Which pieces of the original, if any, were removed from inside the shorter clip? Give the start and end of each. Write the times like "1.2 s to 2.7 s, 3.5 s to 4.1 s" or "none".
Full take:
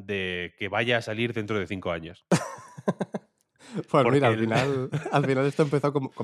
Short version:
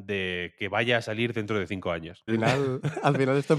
2.3 s to 4.4 s